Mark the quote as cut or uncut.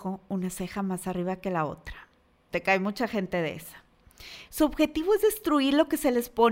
cut